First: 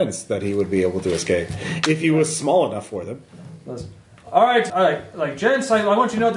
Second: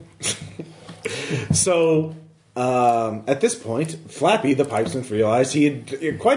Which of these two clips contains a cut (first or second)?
first